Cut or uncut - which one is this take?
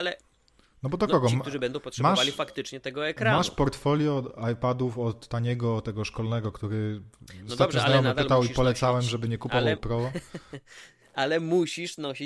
uncut